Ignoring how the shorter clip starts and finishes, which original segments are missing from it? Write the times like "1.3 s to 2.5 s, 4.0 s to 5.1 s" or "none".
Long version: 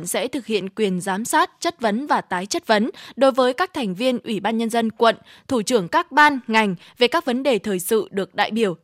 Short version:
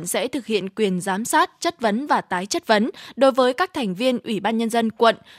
none